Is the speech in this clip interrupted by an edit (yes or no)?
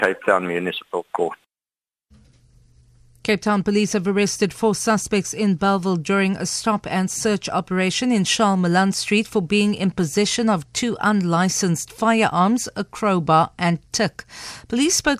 no